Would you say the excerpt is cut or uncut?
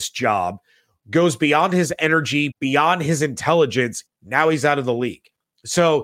cut